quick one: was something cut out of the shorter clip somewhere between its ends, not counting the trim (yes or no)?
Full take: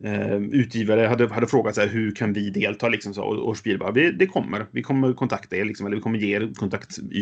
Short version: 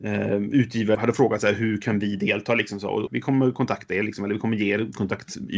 yes